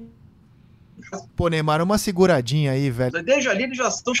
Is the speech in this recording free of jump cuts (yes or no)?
no